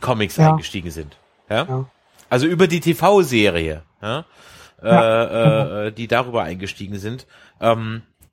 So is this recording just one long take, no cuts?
yes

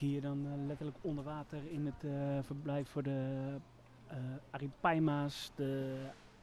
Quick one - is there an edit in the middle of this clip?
no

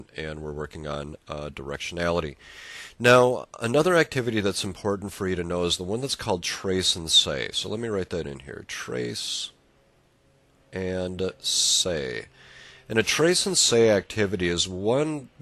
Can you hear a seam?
no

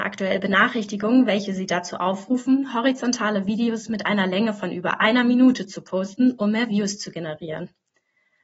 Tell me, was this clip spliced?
no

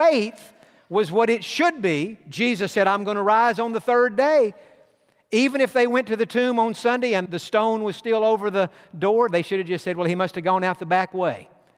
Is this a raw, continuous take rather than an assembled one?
no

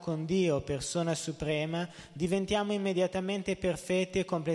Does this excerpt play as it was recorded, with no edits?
yes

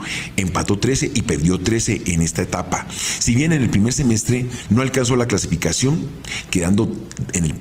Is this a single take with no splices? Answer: yes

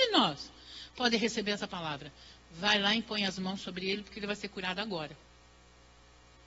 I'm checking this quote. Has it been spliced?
no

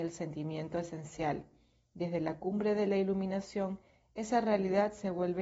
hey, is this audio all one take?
yes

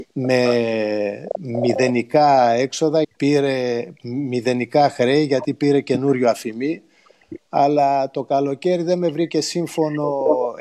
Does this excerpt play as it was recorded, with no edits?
no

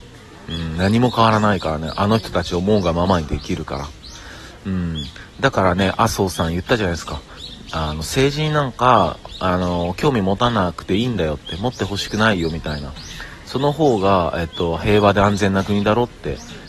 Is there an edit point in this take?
no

